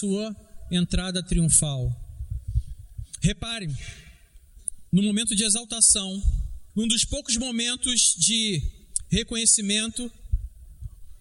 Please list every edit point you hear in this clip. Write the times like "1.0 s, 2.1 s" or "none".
4.9 s, 6.7 s